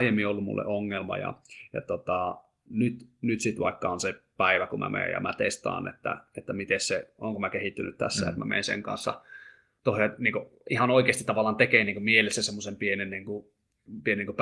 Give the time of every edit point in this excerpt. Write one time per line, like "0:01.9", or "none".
none